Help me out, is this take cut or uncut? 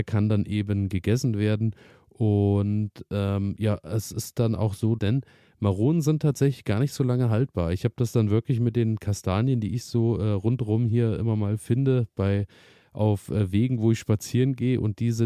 cut